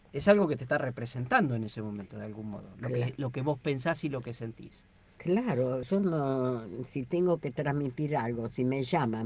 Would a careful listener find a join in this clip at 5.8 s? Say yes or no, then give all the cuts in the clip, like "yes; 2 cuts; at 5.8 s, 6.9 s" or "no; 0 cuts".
yes; 1 cut; at 5.8 s